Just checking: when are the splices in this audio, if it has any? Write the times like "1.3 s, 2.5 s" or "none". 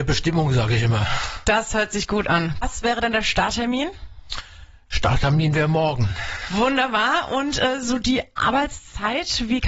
2.6 s